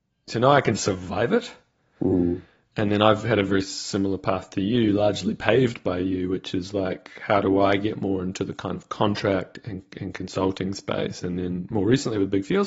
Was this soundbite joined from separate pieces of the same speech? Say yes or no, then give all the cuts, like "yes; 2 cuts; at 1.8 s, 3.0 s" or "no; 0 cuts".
no; 0 cuts